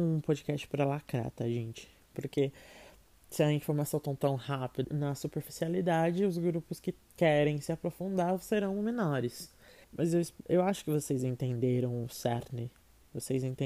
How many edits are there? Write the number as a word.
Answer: three